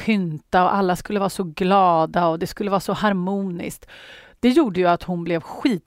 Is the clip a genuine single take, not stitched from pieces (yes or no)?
yes